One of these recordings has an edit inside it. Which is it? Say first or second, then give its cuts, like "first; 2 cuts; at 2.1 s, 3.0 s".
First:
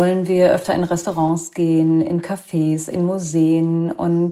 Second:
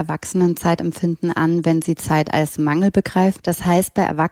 second; 1 cut; at 3.4 s